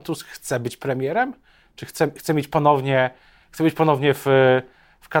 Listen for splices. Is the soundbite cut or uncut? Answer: uncut